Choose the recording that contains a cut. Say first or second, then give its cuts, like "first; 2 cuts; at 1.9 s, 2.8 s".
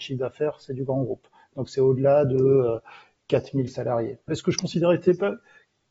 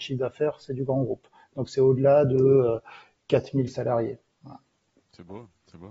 first; 1 cut; at 4.3 s